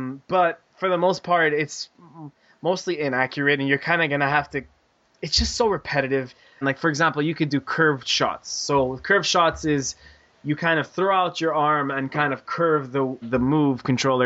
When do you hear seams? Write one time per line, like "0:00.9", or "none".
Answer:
0:06.6
0:13.2

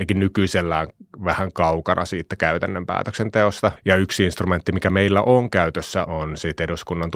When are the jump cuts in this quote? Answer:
0:03.8
0:06.1

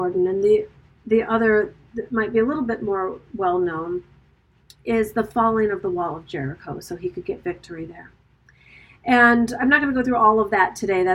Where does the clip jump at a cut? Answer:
none

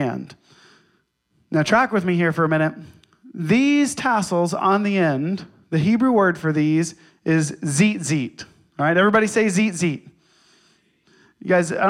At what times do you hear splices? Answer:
none

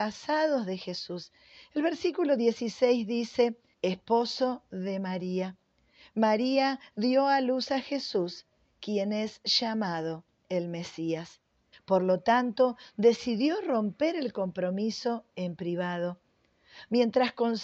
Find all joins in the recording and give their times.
0:03.7
0:11.7

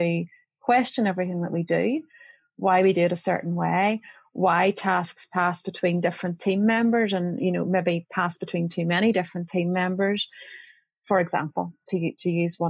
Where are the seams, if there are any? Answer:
none

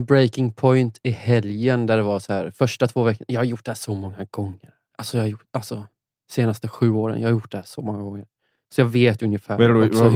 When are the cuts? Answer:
none

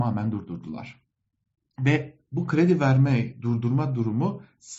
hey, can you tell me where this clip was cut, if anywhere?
none

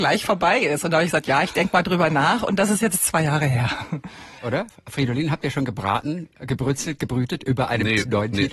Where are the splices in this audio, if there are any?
0:04.4

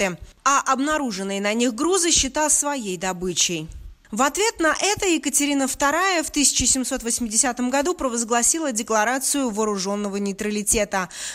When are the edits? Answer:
none

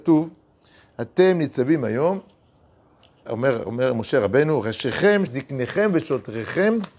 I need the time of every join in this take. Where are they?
0:03.3
0:05.3

